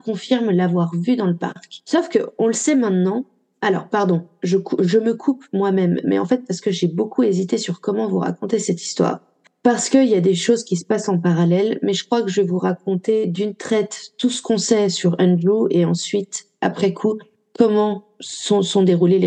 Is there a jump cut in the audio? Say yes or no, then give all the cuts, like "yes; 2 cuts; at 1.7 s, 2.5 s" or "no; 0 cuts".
no; 0 cuts